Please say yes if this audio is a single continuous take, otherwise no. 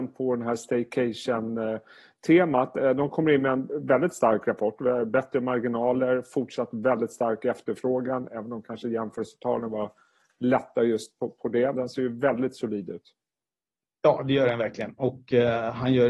no